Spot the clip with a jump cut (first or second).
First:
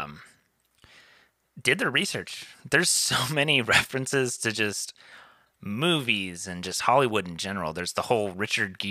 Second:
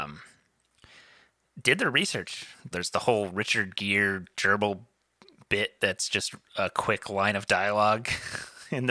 second